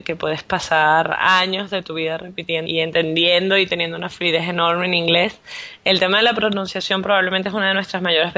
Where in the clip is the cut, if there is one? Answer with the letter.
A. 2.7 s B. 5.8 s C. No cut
A